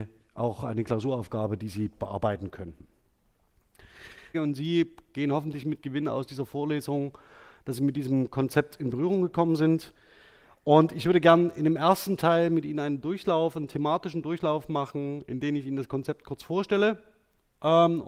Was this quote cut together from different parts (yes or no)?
yes